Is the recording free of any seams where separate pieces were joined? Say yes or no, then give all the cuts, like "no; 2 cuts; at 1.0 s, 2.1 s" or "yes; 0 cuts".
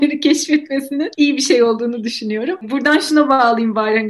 yes; 0 cuts